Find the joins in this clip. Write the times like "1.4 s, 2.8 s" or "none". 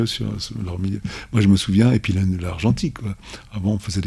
none

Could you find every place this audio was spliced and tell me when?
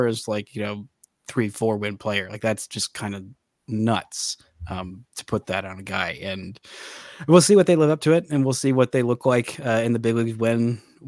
none

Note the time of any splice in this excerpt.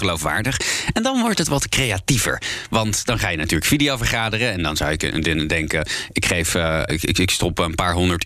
6.9 s

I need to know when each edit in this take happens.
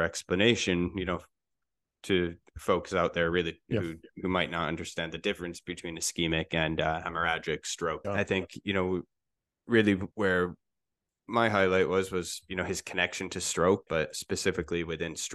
8.0 s, 10.1 s, 13.9 s

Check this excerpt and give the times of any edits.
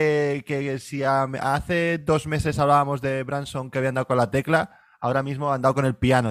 none

